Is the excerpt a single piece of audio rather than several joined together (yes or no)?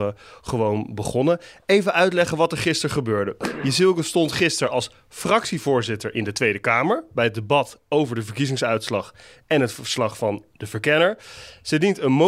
yes